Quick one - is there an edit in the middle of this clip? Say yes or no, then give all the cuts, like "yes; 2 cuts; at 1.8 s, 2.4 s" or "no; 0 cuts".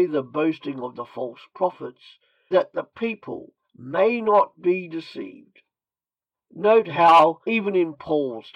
yes; 2 cuts; at 2.5 s, 3.6 s